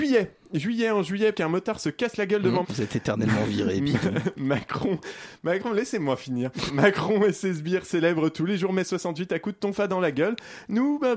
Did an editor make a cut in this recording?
yes; 3 cuts; at 1.3 s, 2.6 s, 6.7 s

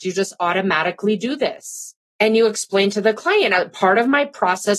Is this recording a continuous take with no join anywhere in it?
yes; 0 cuts

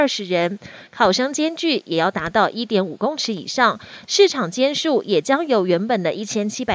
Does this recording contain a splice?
no; 0 cuts

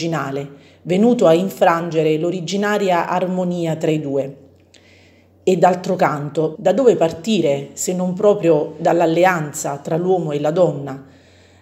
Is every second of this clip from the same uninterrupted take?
no; 1 cut; at 6.6 s

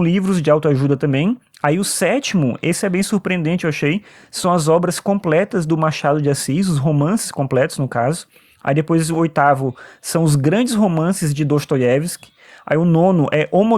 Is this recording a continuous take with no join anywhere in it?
yes; 0 cuts

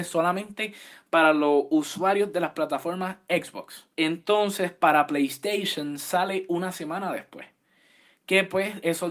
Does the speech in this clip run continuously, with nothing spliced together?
no; 1 cut; at 3.9 s

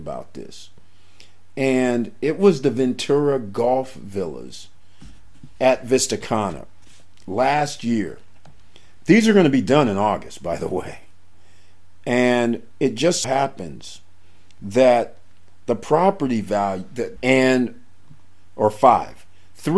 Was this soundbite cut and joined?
yes; 2 cuts; at 13.2 s, 17.2 s

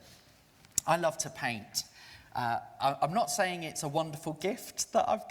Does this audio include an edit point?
no; 0 cuts

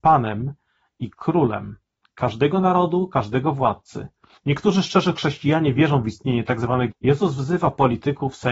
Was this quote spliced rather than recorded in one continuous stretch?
yes; 2 cuts; at 4.4 s, 6.9 s

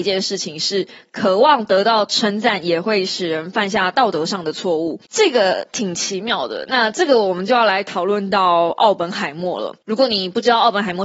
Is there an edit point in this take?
no; 0 cuts

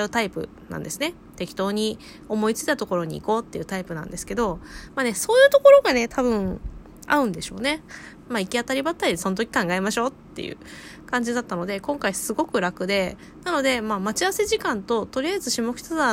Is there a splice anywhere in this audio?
yes; 1 cut; at 8.2 s

